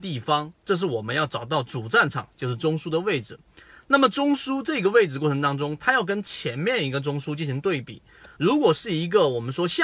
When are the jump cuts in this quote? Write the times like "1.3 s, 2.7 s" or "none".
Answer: 8.4 s